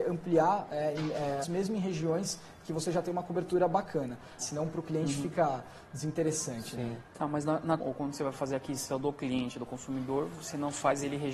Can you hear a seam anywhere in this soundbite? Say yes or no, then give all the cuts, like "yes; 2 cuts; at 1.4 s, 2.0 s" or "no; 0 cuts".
yes; 3 cuts; at 1.4 s, 4.4 s, 7.8 s